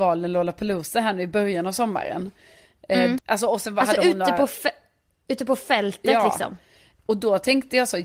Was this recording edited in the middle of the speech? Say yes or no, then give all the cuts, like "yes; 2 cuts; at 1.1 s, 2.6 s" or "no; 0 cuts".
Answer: yes; 1 cut; at 3.2 s